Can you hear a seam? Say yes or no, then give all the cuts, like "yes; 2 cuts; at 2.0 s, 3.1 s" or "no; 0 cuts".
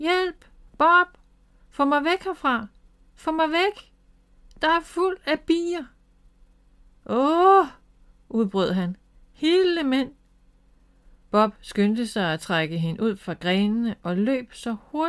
no; 0 cuts